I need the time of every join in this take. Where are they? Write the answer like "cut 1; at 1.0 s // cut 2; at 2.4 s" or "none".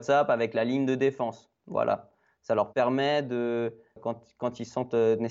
cut 1; at 4.0 s